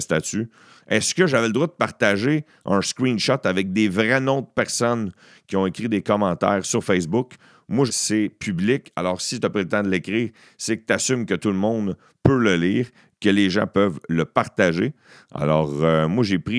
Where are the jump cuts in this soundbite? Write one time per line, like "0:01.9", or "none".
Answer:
0:07.9